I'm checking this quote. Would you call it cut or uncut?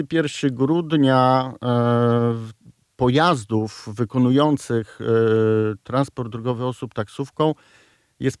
uncut